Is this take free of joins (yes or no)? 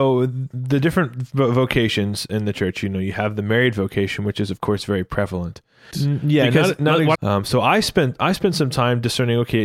no